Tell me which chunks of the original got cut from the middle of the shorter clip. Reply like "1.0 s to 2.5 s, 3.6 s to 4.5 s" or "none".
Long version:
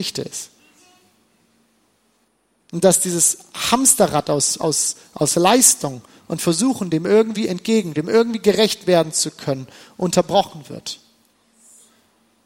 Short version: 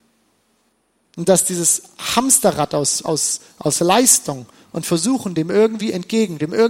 none